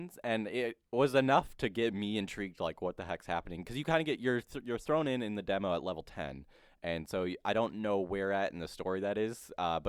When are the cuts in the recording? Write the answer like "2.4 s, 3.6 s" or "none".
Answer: none